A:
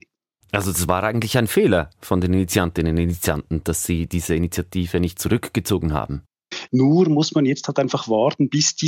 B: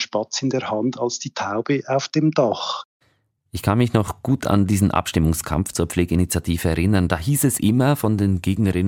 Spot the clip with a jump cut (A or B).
A